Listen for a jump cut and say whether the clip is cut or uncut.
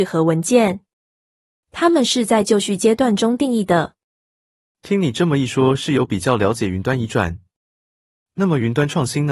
uncut